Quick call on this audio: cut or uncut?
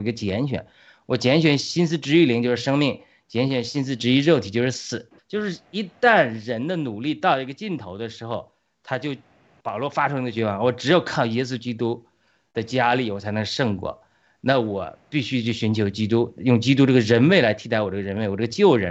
cut